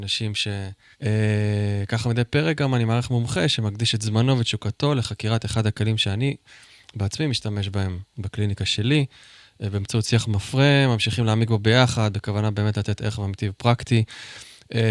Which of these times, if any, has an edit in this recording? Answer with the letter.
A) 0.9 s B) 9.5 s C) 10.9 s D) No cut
A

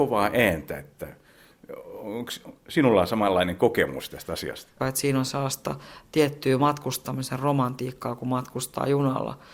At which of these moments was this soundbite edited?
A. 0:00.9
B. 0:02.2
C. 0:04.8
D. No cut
C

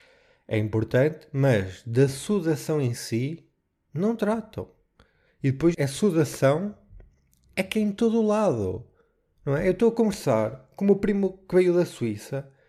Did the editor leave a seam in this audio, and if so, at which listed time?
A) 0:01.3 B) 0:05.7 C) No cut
B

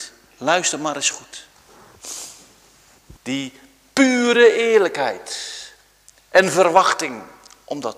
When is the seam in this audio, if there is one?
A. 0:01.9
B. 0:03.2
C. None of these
B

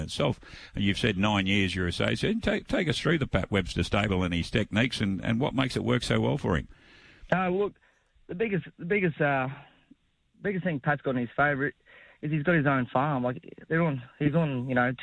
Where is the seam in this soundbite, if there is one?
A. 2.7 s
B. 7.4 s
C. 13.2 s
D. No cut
D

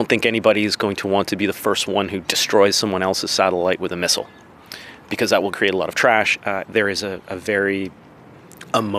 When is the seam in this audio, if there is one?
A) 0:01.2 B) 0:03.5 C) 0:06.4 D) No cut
C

